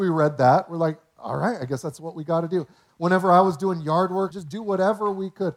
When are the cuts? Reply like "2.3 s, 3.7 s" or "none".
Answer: 2.9 s, 4.3 s